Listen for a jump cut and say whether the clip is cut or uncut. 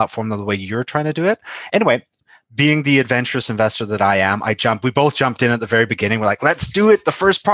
uncut